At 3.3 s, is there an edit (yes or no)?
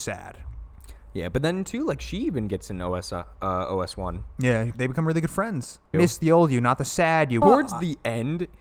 no